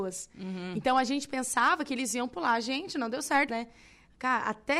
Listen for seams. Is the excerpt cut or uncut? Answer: cut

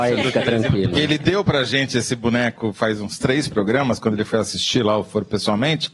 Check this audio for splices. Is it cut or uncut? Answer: uncut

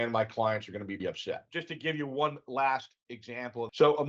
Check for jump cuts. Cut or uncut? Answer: cut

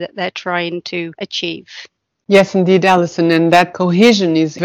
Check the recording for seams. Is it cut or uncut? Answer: uncut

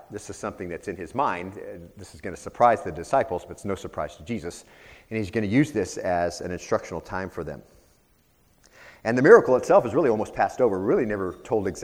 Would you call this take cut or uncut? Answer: uncut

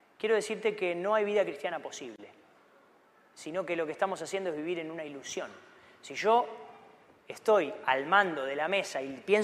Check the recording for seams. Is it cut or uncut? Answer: uncut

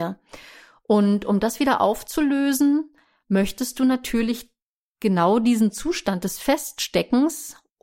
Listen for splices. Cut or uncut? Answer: uncut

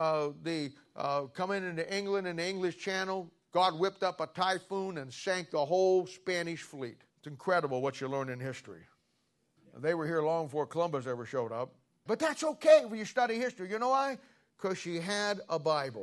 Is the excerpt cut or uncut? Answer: cut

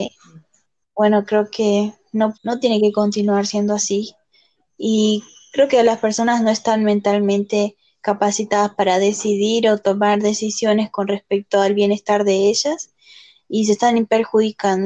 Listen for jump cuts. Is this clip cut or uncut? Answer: cut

